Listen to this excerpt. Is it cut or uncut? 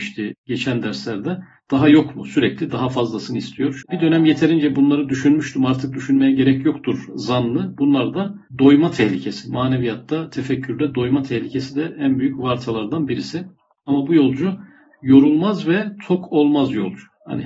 cut